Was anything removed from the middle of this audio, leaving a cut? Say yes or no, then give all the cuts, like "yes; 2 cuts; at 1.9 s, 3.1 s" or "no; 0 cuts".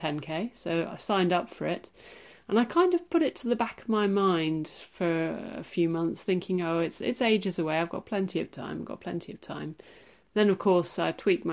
no; 0 cuts